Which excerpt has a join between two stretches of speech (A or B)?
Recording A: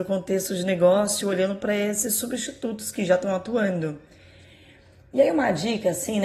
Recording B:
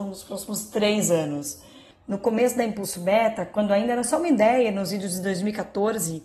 B